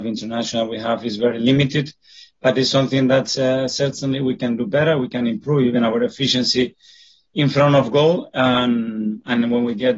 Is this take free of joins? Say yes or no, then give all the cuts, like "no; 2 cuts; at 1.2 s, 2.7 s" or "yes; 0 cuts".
yes; 0 cuts